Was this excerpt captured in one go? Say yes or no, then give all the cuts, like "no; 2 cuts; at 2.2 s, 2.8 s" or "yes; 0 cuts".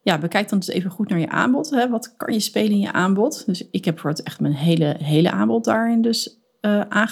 yes; 0 cuts